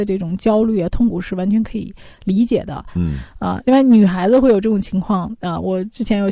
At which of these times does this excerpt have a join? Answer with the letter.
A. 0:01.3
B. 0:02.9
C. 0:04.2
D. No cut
B